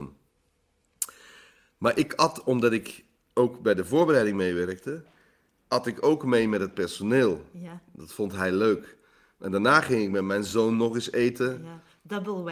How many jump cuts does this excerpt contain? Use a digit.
0